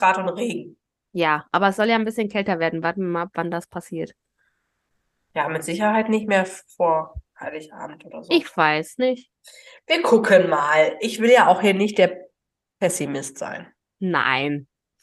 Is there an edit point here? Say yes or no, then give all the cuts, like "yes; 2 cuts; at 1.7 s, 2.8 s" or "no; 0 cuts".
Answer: no; 0 cuts